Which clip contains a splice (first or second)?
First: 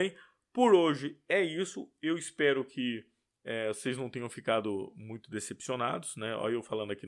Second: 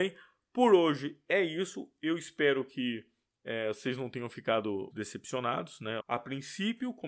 second